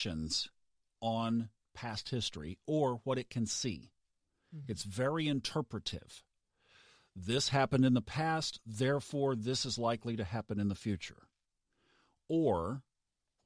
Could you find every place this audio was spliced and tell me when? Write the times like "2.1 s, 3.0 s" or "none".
none